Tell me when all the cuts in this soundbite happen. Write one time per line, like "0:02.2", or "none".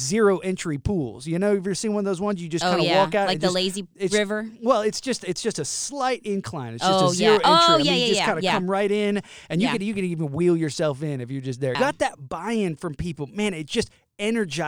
0:11.7